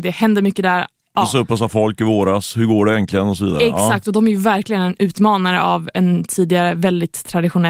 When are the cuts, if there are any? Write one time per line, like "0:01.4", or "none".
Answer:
none